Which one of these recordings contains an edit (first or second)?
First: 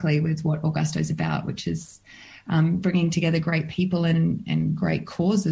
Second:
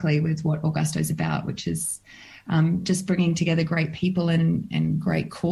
first